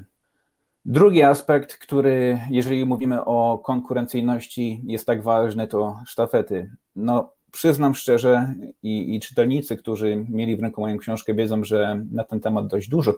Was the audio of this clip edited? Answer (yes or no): no